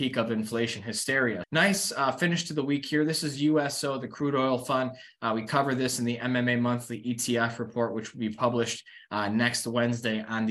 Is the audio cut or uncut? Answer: cut